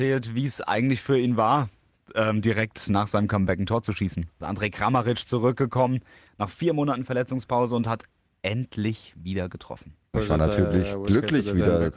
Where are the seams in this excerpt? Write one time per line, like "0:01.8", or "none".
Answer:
0:04.4
0:10.1